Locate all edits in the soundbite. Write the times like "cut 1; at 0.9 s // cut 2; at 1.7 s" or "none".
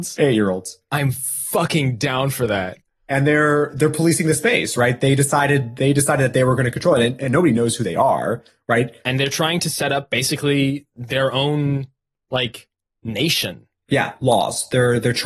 none